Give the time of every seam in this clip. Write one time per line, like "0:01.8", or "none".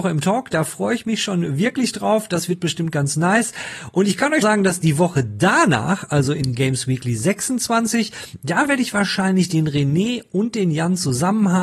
0:04.4

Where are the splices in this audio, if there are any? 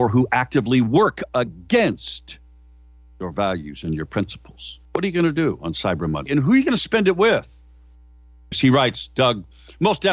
0:06.3
0:08.5

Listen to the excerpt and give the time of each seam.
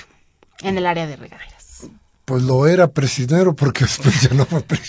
none

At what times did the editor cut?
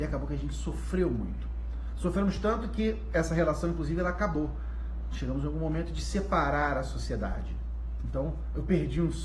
none

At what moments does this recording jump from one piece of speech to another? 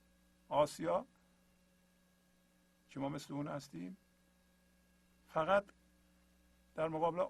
none

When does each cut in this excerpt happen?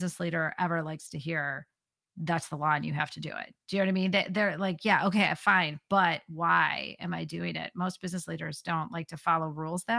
none

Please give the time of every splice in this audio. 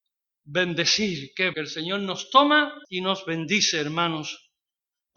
0:01.5
0:02.8

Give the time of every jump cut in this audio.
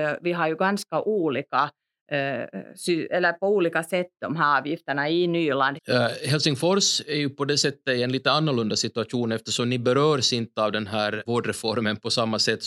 0:05.8
0:11.3

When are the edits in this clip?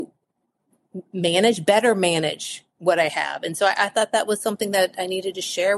none

